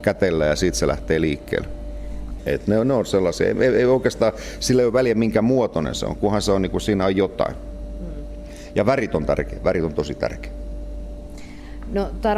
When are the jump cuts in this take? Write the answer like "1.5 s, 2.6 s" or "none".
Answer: 2.4 s

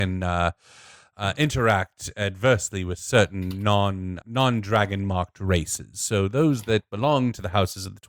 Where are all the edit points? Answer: 4.2 s

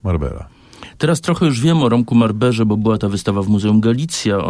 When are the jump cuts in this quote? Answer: 1.0 s

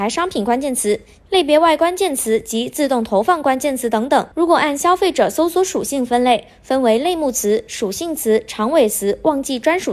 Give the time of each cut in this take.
1.2 s

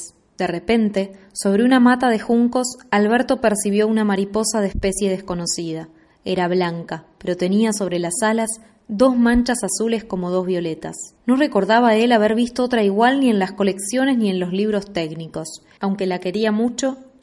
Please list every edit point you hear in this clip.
11.2 s, 15.8 s

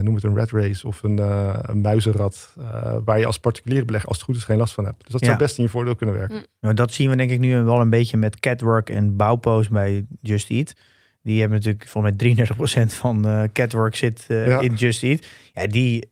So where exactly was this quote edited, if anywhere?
none

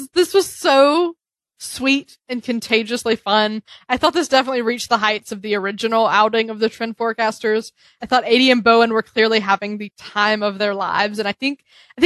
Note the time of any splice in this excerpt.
none

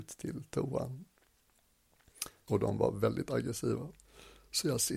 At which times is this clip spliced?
2.5 s

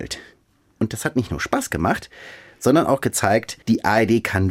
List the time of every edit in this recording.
3.6 s

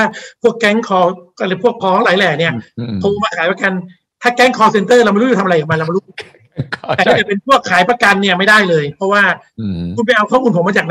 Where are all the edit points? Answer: 1.8 s

